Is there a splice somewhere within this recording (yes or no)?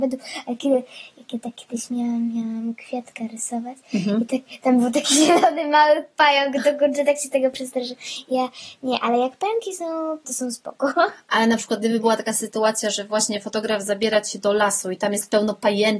yes